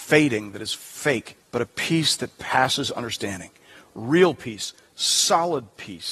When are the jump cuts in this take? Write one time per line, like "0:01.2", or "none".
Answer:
0:01.4